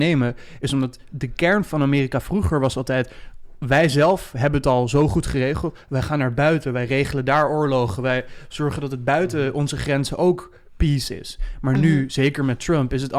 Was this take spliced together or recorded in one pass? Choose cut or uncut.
uncut